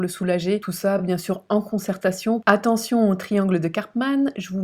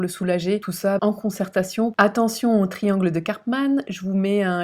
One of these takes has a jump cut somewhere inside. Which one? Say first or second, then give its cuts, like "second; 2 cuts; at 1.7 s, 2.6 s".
second; 1 cut; at 1.0 s